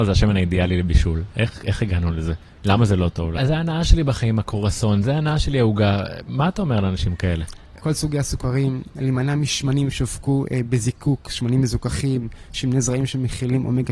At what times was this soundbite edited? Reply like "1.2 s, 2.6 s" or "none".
3.4 s, 7.8 s

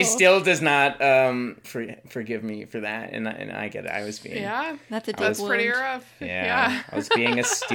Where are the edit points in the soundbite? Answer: 1.6 s

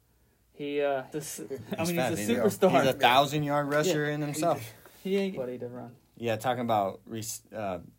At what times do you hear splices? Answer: 1.1 s, 5.4 s

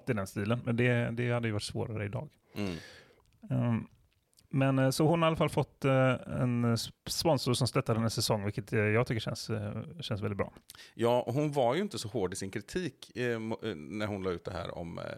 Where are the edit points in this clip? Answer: 7.0 s

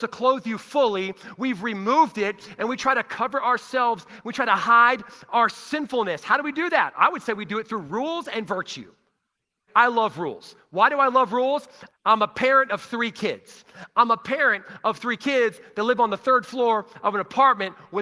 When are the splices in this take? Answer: 9.7 s, 11.9 s

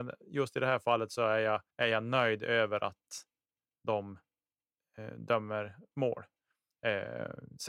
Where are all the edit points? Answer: 1.7 s

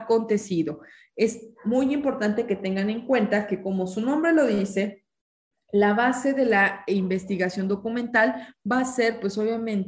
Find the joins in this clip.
none

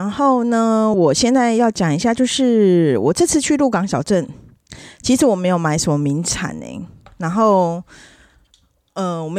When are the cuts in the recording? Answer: none

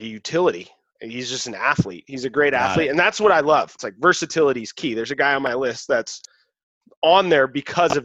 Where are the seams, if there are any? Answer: 3.8 s

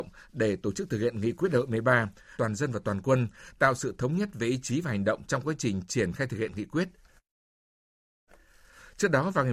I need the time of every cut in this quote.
2.3 s

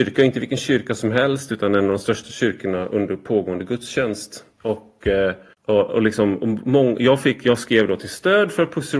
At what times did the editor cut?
none

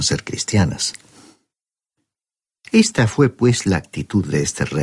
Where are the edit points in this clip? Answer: none

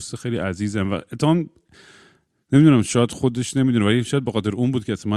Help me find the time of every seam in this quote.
none

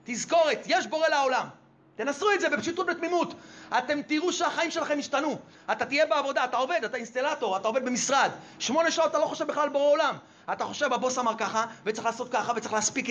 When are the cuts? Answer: none

